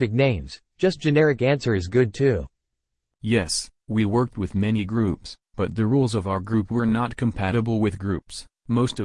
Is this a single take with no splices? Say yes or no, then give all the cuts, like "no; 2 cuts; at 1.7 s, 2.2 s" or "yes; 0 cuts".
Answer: yes; 0 cuts